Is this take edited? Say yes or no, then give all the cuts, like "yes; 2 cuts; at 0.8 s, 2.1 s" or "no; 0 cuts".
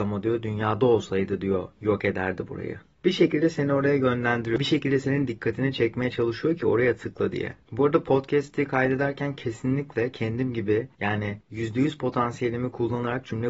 no; 0 cuts